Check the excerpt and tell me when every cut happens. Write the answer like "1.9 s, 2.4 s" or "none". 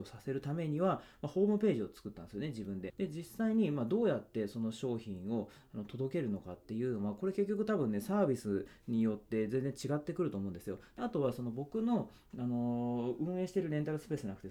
2.9 s, 11.0 s